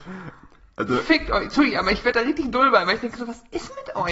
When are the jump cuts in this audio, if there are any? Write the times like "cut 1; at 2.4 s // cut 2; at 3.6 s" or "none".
none